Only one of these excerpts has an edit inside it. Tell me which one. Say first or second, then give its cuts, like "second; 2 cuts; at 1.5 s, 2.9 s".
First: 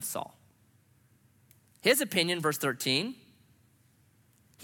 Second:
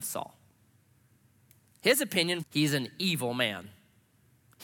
second; 1 cut; at 2.4 s